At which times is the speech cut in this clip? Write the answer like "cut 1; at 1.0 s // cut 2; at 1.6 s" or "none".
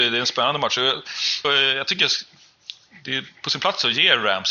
cut 1; at 1.4 s